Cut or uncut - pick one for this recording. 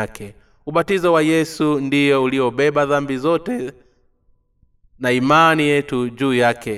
uncut